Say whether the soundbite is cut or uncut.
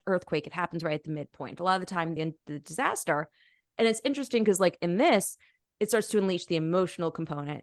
cut